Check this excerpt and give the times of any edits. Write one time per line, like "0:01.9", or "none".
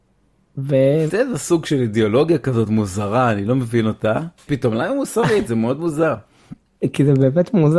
0:01.1
0:04.5